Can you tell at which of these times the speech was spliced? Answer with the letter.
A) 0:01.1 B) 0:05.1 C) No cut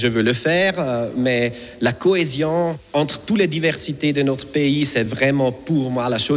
C